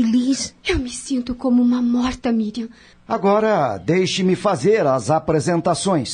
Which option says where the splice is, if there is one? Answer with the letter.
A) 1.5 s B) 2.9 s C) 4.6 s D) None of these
B